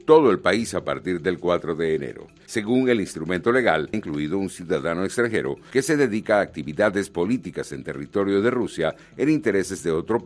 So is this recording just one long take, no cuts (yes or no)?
no